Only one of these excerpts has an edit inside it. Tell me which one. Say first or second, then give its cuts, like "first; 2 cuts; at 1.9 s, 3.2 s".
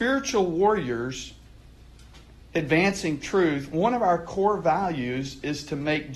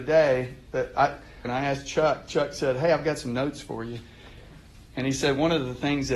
second; 1 cut; at 1.4 s